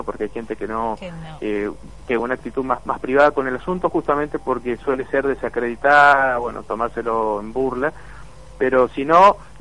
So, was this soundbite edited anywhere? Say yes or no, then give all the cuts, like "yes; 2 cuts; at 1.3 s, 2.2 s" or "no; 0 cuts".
yes; 1 cut; at 2.2 s